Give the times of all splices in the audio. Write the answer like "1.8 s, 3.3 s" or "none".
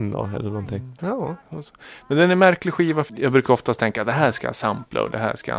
1.0 s, 3.1 s